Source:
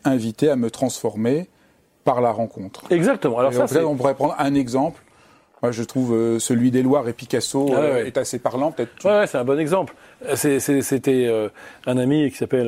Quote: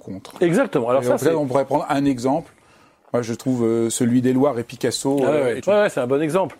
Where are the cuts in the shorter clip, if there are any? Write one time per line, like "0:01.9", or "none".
0:05.6